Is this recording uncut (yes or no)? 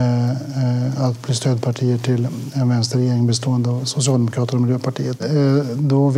no